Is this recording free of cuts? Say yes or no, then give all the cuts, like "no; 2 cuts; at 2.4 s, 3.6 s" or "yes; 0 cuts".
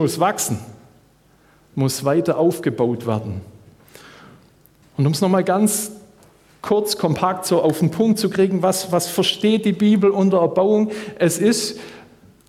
yes; 0 cuts